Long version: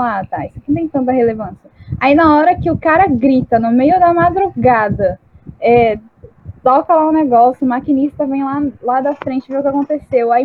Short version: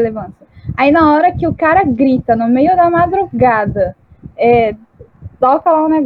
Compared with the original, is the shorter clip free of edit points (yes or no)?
yes